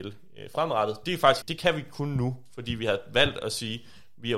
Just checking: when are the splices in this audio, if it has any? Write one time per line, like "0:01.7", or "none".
0:01.4